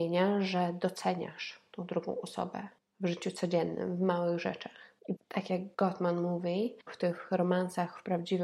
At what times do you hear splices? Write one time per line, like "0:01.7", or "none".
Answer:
0:05.2
0:06.9